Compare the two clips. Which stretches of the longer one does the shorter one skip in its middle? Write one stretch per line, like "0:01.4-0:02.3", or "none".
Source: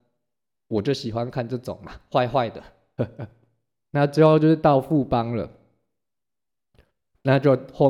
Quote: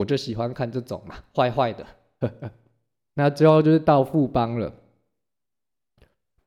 none